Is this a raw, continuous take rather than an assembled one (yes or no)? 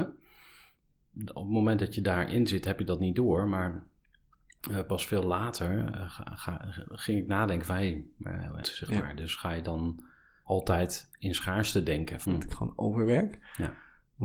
no